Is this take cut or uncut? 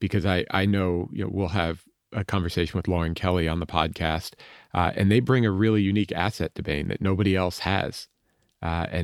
uncut